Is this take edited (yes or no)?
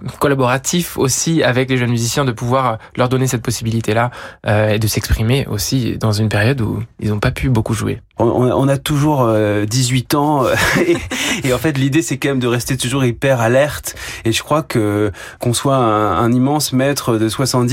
yes